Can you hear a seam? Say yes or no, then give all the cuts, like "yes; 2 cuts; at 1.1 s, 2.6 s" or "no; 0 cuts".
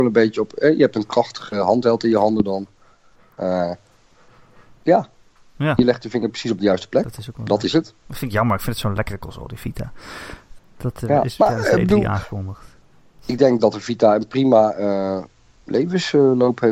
yes; 1 cut; at 10.6 s